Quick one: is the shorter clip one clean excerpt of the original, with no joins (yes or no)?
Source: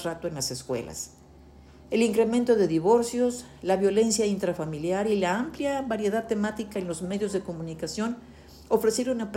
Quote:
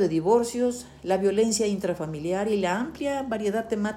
yes